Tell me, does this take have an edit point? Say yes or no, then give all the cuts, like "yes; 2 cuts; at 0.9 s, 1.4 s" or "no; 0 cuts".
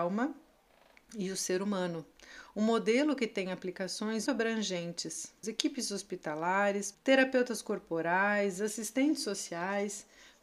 yes; 3 cuts; at 4.3 s, 5.4 s, 6.9 s